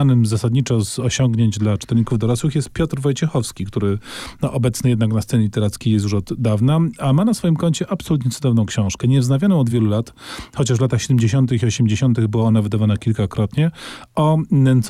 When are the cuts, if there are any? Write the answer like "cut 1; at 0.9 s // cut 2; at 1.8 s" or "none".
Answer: cut 1; at 9.7 s